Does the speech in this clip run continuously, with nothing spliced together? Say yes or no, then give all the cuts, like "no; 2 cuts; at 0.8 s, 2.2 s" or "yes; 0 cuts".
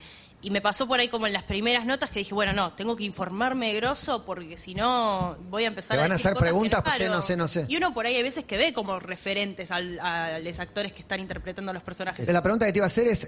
no; 2 cuts; at 6.8 s, 12.3 s